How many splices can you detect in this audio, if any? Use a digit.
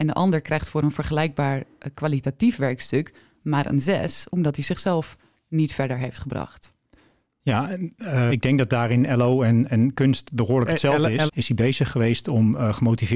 2